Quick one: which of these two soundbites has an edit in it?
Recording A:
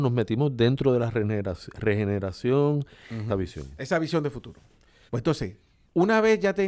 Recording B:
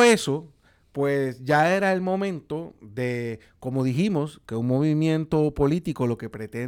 A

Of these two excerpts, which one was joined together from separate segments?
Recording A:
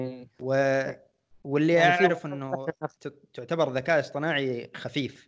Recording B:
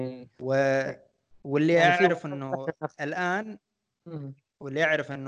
A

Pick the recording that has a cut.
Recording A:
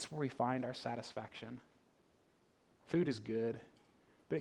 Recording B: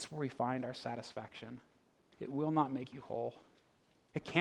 B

